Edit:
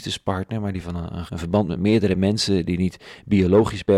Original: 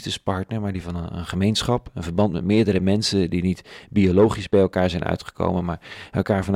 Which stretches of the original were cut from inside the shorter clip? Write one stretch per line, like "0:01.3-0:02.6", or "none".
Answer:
0:01.3-0:01.9